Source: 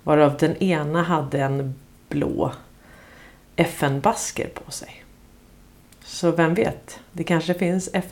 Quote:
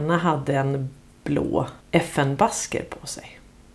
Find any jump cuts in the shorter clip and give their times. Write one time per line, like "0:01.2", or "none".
0:01.8

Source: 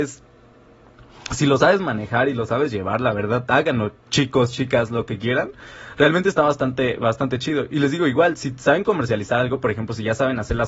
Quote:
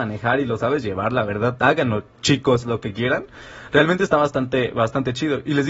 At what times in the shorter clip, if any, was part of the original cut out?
0:02.6

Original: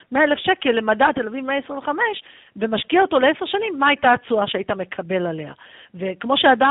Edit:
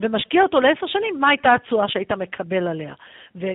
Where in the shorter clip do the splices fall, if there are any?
none

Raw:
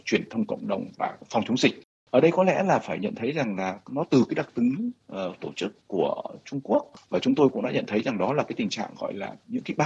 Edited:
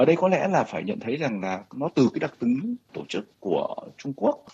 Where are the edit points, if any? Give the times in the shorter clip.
0:02.9

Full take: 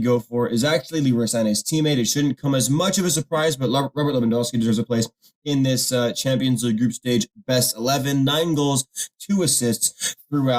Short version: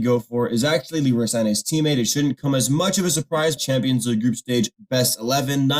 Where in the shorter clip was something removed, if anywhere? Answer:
0:03.6

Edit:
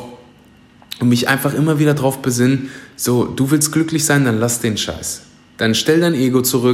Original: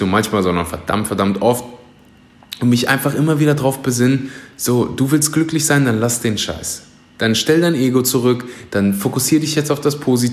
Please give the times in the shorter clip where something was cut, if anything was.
none

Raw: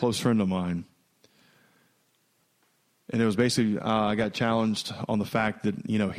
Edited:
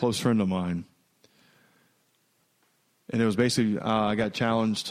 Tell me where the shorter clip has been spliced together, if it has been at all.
none

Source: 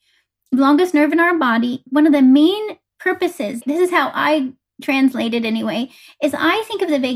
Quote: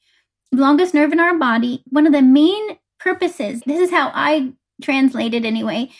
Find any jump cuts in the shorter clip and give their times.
none

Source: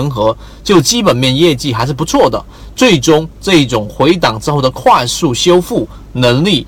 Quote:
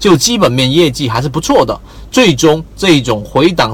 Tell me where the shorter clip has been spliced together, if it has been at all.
none

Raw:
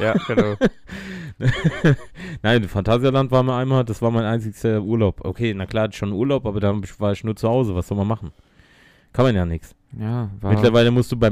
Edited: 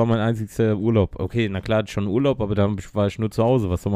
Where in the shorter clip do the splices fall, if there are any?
none

